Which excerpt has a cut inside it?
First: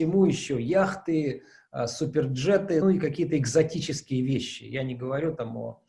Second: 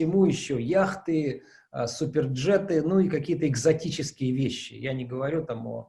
first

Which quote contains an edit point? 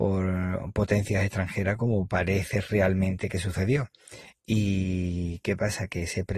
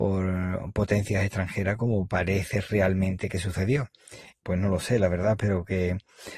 second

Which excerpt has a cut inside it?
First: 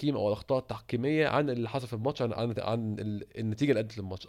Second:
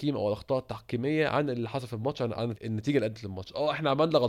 second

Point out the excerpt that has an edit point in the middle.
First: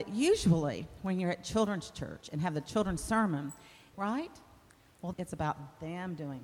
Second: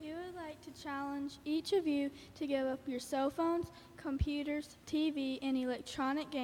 first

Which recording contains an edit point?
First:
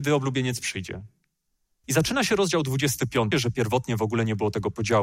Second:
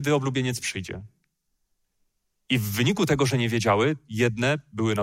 first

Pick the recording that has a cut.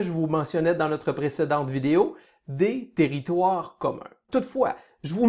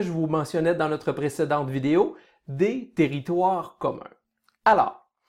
first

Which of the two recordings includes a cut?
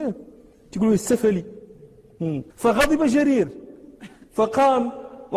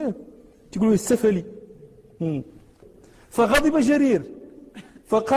first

